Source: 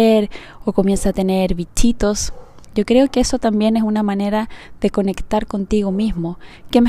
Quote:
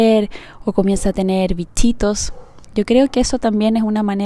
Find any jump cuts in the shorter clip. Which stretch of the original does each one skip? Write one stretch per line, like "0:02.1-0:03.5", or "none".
none